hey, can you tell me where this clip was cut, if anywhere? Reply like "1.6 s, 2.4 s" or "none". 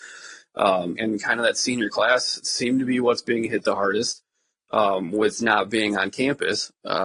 1.0 s